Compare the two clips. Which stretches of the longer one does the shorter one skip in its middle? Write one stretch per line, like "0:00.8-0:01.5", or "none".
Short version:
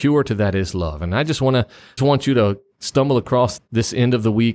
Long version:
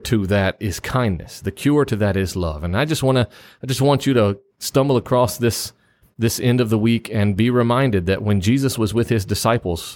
0:03.6-0:03.8
0:05.4-0:06.0